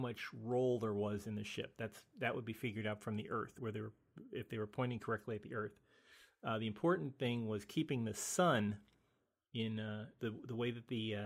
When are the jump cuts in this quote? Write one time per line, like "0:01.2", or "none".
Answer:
0:03.6
0:10.2